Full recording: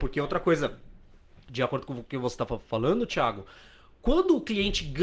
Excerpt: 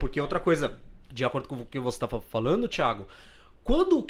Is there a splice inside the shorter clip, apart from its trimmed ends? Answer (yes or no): yes